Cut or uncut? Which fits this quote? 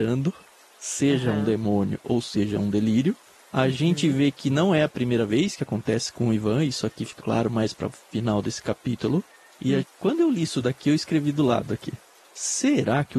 cut